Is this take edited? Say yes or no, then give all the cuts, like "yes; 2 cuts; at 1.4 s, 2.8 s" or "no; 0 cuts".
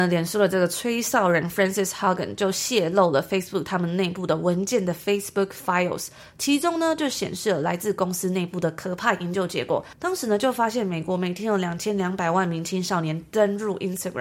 no; 0 cuts